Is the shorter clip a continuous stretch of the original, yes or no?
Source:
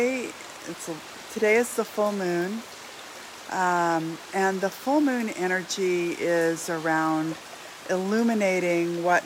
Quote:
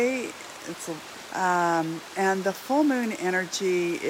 no